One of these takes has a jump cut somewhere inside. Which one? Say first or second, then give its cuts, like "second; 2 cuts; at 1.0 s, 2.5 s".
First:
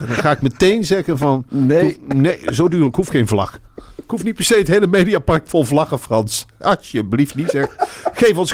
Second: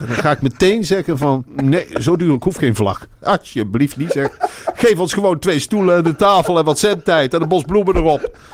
second; 2 cuts; at 1.5 s, 3.1 s